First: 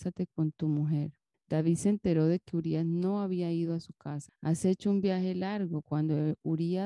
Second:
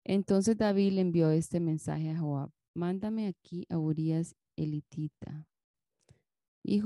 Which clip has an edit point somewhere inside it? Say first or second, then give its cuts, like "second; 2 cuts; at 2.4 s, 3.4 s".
first; 3 cuts; at 1.3 s, 4.3 s, 5.8 s